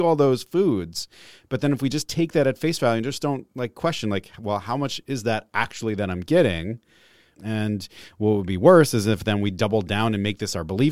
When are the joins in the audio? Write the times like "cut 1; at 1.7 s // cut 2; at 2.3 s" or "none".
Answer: cut 1; at 7.3 s